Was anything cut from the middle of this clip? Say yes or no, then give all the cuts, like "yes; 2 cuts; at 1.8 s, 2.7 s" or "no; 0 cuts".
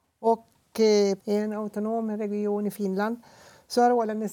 yes; 1 cut; at 1.2 s